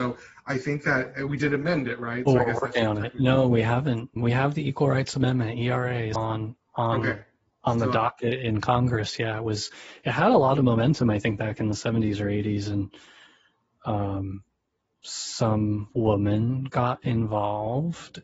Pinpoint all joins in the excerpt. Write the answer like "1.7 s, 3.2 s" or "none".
4.2 s, 6.2 s